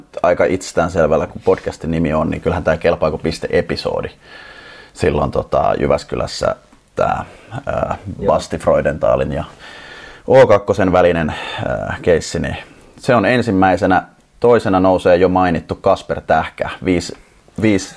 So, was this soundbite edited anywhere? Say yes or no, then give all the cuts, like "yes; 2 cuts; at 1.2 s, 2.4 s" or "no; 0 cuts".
no; 0 cuts